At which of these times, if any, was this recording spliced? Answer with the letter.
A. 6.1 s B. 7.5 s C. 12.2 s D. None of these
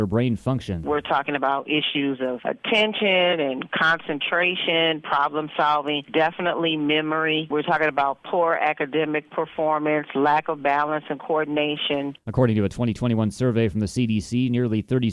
D